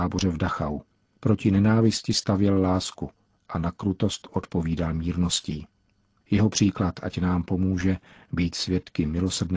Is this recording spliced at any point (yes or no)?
no